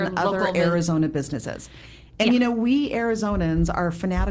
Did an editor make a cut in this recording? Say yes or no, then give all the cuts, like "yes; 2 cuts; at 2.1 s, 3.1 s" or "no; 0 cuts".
no; 0 cuts